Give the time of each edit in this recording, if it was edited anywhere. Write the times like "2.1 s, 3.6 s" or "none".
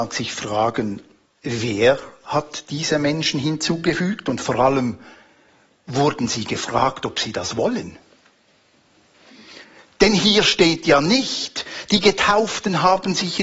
none